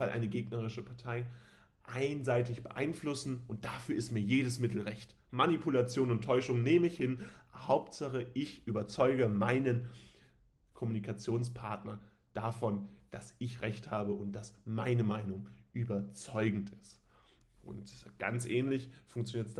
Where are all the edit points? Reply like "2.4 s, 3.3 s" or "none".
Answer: none